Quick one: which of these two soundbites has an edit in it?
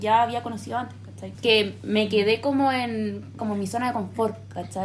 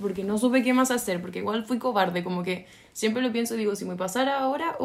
first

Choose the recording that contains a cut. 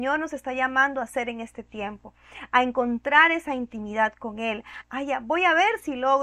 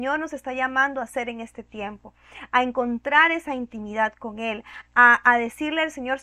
first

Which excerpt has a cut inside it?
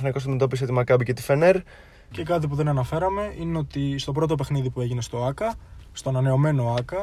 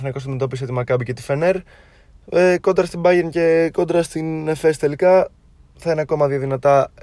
first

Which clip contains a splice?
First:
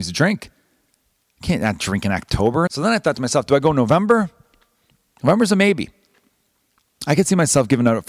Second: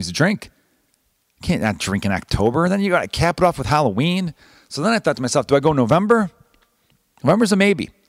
first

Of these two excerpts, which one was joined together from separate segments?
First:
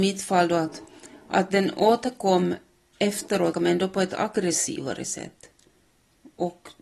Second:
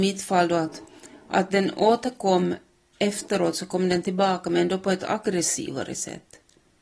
first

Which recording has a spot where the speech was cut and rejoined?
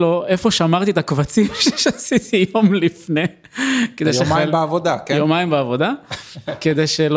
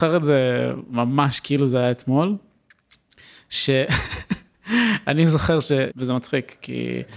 second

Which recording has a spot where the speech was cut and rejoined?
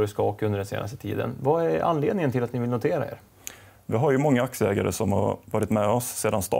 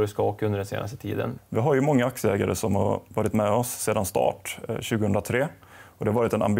second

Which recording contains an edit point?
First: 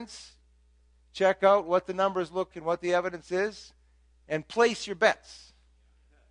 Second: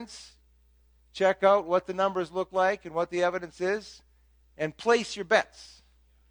first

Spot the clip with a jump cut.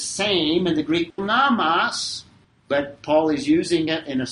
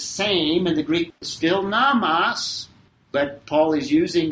first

